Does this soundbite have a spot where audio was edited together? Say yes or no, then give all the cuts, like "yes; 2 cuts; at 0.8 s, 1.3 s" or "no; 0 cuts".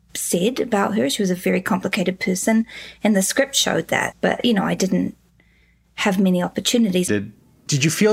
yes; 2 cuts; at 4.1 s, 7.1 s